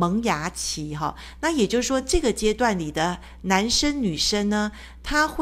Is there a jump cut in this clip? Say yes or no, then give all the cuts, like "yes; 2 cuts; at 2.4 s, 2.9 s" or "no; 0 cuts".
no; 0 cuts